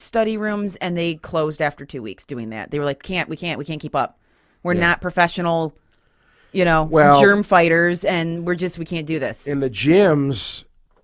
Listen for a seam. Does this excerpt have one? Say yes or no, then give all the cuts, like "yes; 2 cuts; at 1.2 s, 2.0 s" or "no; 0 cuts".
no; 0 cuts